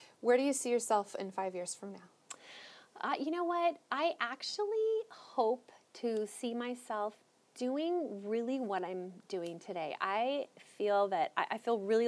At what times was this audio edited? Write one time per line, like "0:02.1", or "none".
none

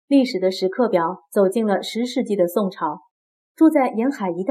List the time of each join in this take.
0:03.5

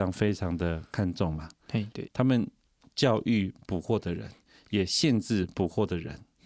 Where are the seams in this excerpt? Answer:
0:02.1

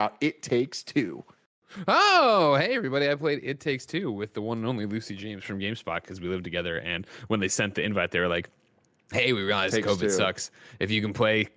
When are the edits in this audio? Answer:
none

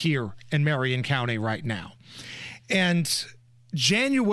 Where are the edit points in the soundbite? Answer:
none

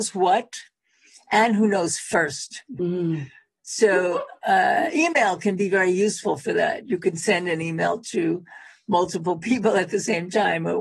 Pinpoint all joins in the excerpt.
none

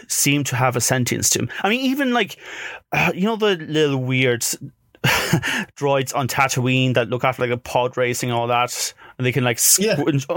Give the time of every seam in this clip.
none

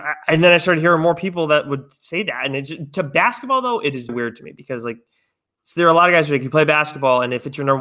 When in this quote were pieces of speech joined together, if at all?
0:04.1

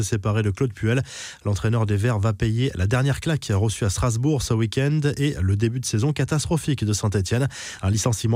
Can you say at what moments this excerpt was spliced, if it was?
none

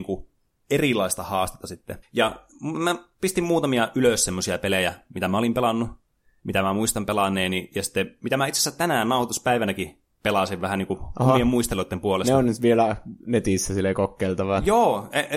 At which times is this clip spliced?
0:02.0

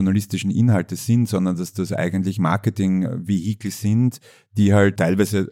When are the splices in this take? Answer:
none

